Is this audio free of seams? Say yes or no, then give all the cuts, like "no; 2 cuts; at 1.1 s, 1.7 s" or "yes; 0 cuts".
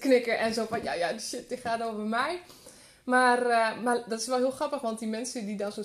yes; 0 cuts